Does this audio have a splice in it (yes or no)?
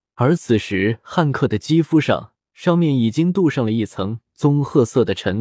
no